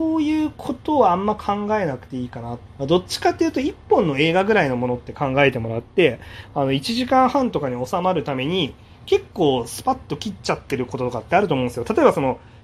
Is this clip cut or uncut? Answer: cut